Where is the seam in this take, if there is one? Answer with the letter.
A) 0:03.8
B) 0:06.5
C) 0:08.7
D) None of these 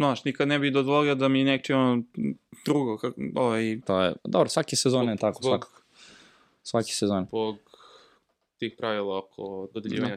A